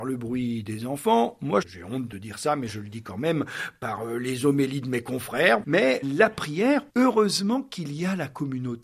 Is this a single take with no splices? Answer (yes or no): no